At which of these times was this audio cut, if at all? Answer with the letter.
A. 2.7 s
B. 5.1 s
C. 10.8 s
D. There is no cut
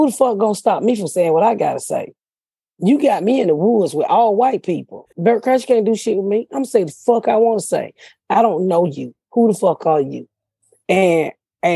B